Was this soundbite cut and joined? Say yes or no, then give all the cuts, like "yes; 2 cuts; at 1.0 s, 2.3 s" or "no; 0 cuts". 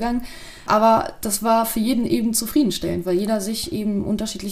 no; 0 cuts